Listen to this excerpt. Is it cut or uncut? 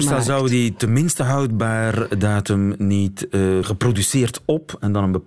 cut